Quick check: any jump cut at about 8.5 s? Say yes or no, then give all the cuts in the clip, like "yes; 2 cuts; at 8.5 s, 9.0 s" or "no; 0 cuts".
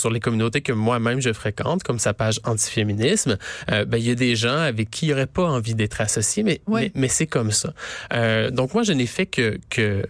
no; 0 cuts